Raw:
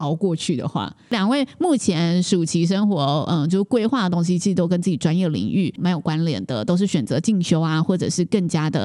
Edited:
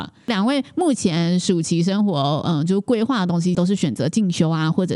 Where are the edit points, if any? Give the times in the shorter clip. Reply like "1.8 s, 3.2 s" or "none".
3.5 s